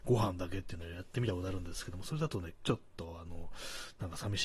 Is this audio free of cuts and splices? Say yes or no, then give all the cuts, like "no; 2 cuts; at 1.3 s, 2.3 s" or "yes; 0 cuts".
yes; 0 cuts